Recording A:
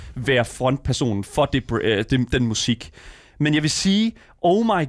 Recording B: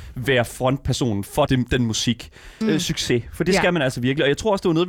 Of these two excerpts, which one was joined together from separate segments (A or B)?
B